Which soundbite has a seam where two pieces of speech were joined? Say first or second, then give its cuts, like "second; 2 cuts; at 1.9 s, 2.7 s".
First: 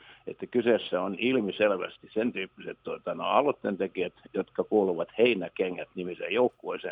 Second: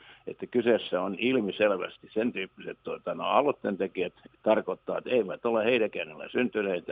second; 1 cut; at 4.3 s